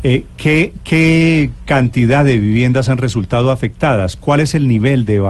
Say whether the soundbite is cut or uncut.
uncut